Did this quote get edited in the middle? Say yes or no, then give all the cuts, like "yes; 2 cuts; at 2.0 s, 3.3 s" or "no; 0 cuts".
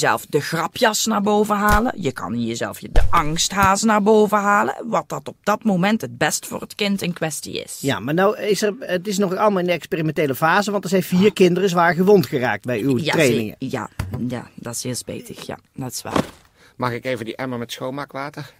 no; 0 cuts